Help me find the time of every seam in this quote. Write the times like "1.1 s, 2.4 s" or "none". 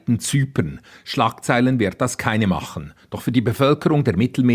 none